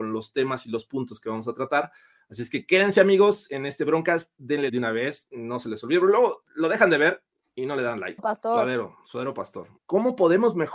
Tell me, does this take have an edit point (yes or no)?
yes